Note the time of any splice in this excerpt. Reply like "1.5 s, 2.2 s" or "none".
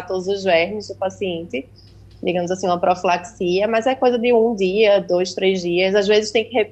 none